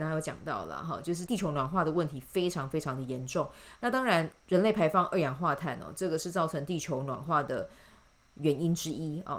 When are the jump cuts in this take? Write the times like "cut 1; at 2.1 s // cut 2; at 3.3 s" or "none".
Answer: cut 1; at 1.3 s